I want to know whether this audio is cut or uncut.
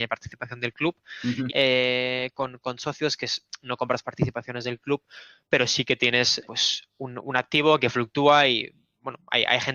cut